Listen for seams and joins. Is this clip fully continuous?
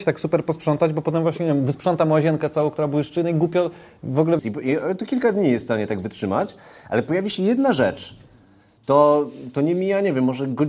no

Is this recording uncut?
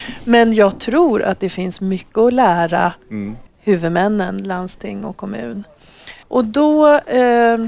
no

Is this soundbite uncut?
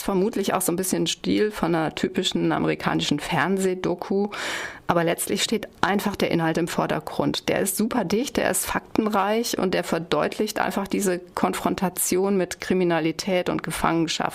yes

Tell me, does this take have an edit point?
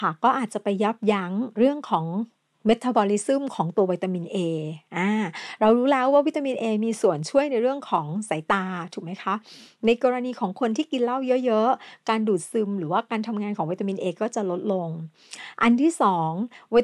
no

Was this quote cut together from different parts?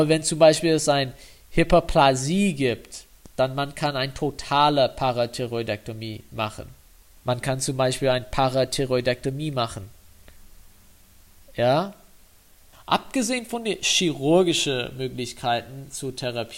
yes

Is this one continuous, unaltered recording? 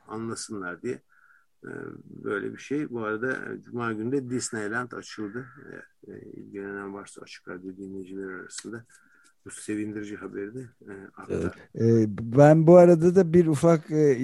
no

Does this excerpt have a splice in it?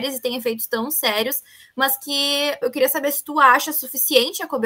yes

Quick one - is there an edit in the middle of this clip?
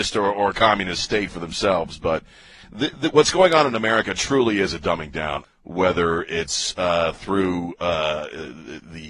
yes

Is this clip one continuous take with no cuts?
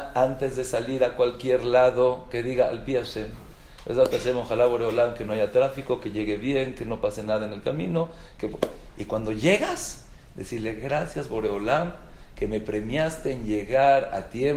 yes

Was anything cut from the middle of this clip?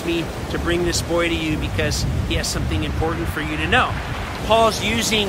yes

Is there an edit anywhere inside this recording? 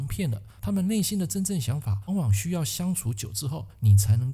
yes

